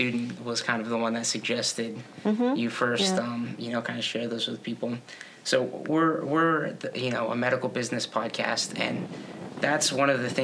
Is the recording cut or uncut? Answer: uncut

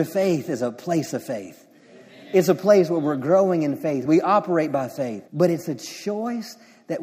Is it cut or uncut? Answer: cut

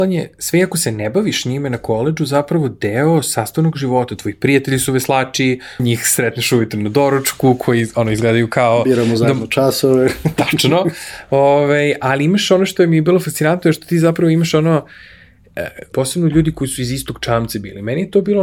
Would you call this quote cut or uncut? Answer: cut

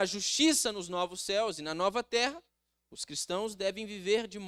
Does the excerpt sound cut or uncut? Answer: uncut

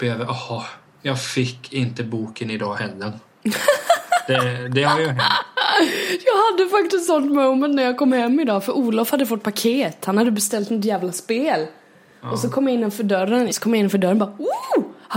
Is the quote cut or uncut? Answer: cut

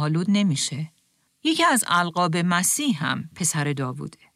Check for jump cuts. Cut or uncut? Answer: cut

